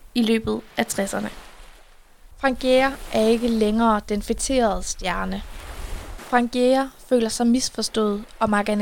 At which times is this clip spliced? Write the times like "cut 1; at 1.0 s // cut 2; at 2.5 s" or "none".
cut 1; at 2.3 s // cut 2; at 6.2 s